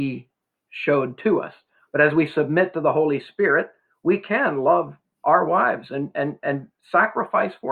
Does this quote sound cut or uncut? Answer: uncut